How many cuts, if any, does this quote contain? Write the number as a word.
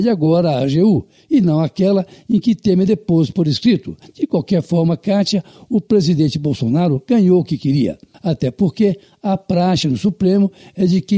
two